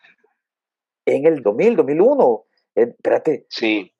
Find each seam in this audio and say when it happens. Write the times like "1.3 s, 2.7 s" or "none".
1.4 s

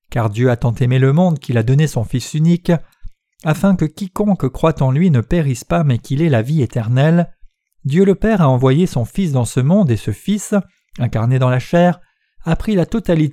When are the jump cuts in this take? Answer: 7.7 s

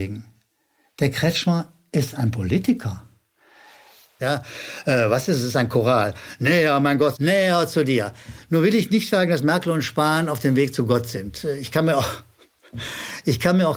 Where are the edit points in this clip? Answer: 4.2 s, 7.1 s

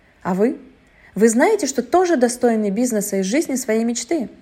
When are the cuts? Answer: none

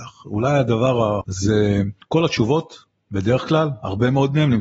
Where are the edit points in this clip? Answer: 1.2 s

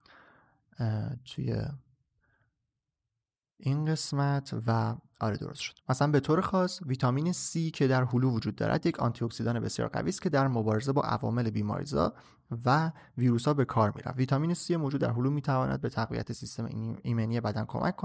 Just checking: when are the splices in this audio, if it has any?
5.8 s

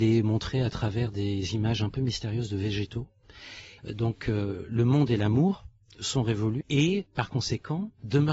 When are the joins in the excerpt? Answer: 3.8 s, 6.6 s

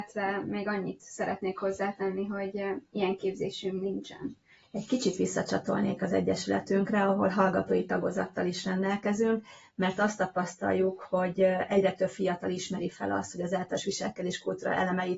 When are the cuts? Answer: 4.6 s

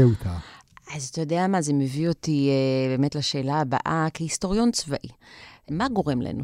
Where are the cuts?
none

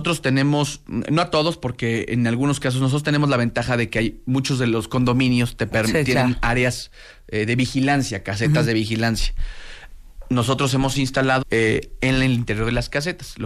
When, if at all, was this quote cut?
11.4 s

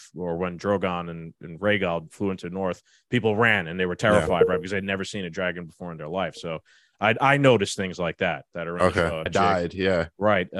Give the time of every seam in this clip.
9.3 s

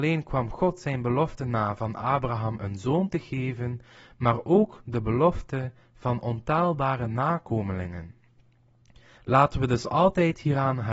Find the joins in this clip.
9.2 s

